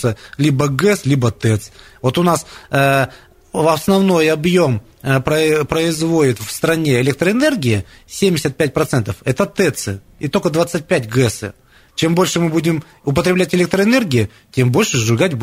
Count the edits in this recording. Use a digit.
1